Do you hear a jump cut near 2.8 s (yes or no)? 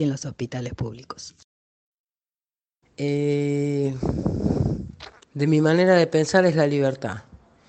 yes